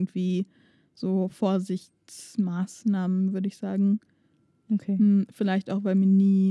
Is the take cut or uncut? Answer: uncut